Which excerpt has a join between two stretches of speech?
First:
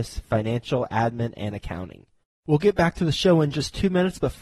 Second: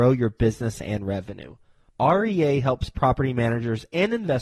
first; 1 cut; at 2.2 s

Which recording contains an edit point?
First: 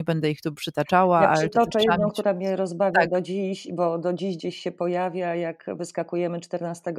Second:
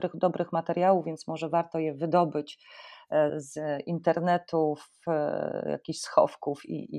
second; 1 cut; at 3.3 s

